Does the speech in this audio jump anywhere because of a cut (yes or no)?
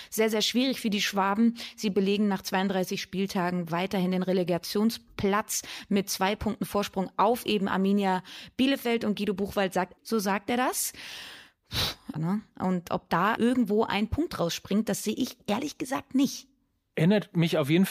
yes